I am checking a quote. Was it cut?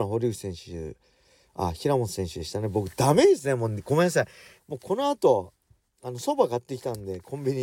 yes; 1 cut; at 4.6 s

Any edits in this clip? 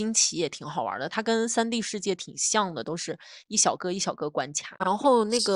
no; 0 cuts

